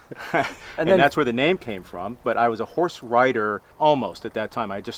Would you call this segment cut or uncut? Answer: cut